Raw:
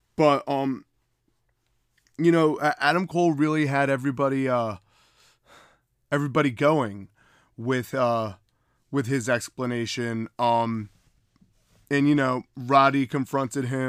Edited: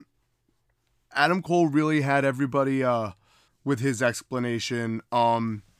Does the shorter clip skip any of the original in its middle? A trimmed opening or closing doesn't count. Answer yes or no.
yes